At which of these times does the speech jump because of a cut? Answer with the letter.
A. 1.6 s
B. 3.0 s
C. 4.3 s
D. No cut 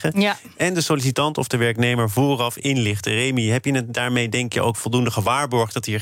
D